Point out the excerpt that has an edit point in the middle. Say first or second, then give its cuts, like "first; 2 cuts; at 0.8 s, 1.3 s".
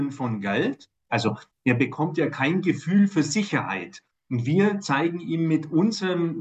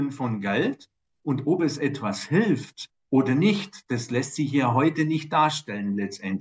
first; 1 cut; at 1.1 s